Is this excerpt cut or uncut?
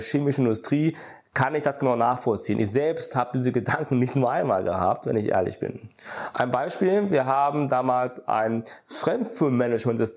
uncut